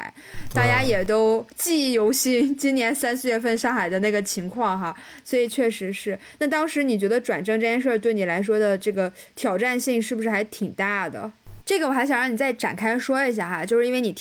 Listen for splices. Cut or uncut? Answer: cut